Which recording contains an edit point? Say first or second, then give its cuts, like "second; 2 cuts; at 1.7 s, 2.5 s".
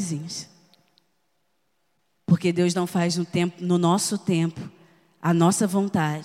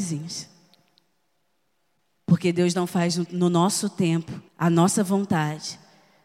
second; 2 cuts; at 3.3 s, 4.5 s